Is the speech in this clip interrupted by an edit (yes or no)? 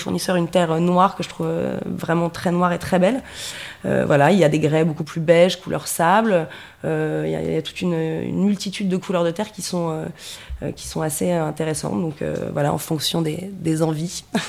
no